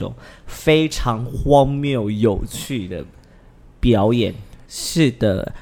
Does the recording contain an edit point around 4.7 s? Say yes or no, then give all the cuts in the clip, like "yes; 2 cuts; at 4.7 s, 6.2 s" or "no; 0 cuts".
yes; 1 cut; at 4.7 s